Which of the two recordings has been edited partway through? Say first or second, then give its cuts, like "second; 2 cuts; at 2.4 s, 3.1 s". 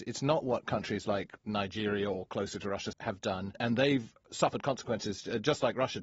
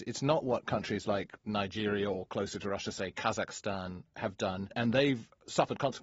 first; 1 cut; at 2.9 s